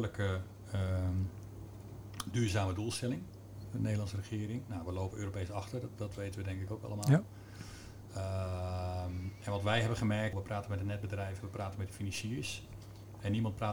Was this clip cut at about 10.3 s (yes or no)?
yes